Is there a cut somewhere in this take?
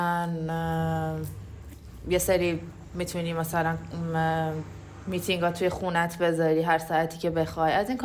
no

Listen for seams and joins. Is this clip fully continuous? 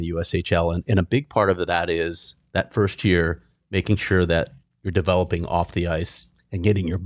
yes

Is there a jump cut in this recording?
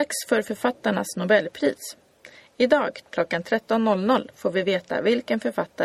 yes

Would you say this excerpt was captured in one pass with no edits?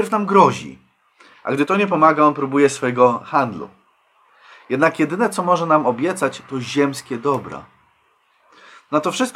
yes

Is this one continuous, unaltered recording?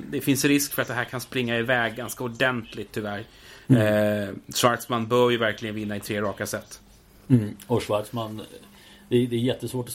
yes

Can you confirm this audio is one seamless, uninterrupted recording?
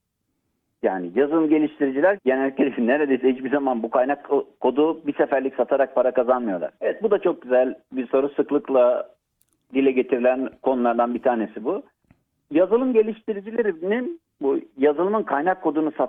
no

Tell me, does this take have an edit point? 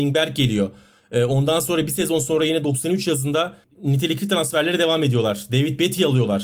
no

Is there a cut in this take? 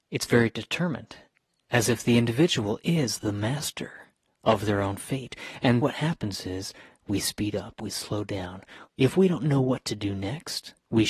yes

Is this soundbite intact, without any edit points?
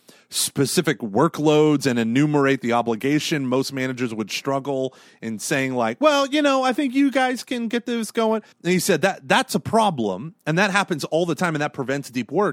no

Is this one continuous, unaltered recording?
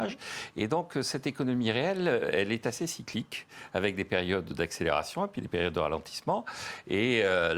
yes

